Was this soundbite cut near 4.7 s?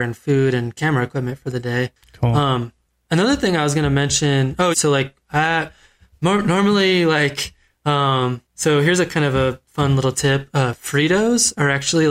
yes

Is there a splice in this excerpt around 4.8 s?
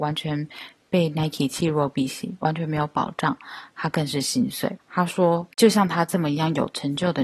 yes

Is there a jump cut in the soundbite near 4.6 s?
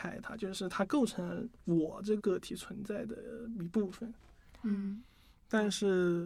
yes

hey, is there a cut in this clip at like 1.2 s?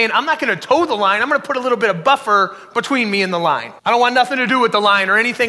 no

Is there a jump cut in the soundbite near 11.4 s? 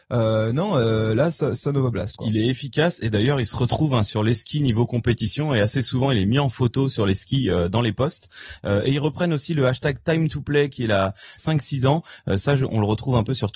yes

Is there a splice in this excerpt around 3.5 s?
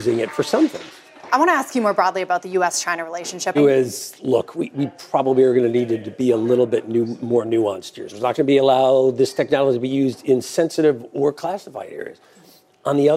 yes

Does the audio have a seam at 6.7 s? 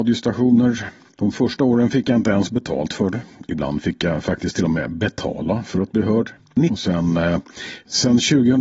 yes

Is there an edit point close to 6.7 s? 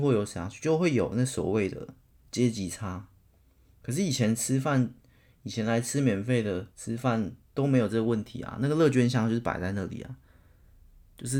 yes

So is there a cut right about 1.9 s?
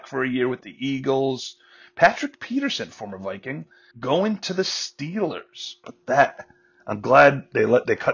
no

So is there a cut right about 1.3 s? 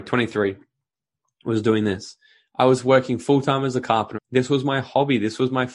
no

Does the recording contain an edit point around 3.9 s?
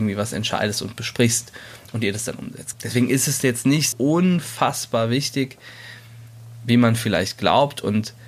yes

